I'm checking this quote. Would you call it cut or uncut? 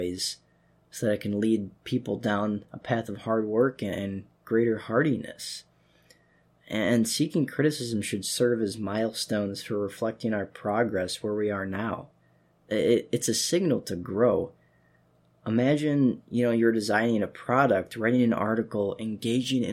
uncut